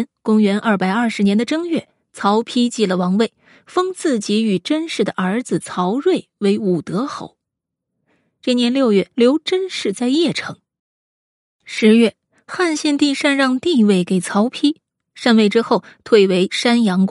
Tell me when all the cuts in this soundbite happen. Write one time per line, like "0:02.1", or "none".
0:09.1